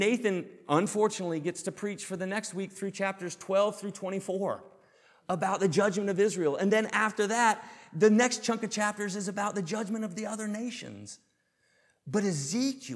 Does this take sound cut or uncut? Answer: uncut